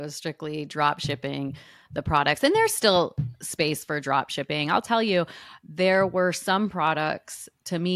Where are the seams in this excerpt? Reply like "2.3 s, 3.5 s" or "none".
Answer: none